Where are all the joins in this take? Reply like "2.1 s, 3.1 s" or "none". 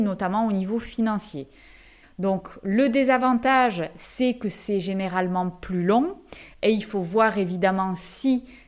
2.0 s